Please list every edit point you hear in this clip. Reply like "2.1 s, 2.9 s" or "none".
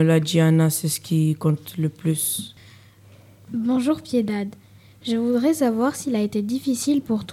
none

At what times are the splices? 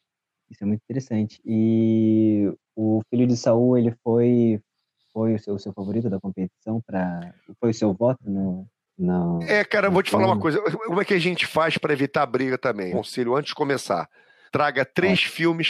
12.9 s, 14.5 s

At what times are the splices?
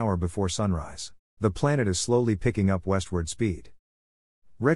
1.4 s

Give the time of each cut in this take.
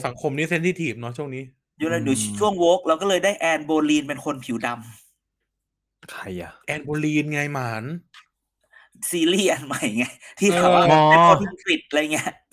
6.6 s

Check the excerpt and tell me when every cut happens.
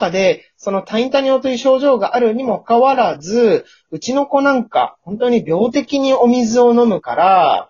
2.6 s

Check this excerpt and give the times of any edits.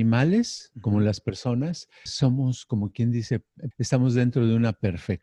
2.1 s, 3.7 s

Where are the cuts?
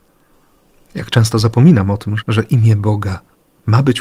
2.2 s

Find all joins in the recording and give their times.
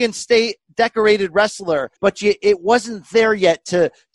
2.0 s

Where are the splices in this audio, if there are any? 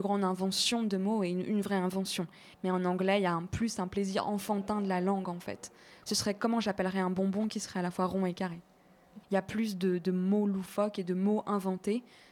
2.5 s, 6.0 s, 9.2 s

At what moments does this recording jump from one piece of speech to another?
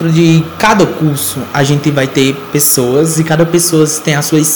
none

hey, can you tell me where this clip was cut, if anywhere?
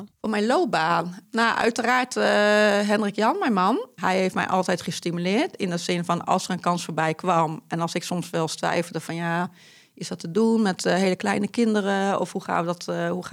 none

